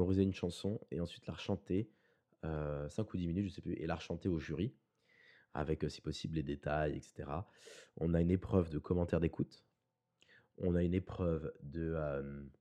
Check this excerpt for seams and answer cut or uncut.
uncut